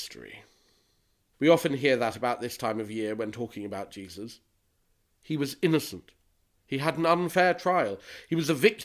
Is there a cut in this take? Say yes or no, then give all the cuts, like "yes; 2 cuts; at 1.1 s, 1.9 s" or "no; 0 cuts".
yes; 1 cut; at 1.3 s